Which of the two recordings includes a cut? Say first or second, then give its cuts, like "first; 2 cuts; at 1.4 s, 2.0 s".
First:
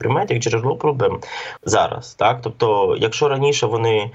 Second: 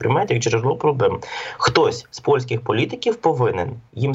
first; 1 cut; at 1.6 s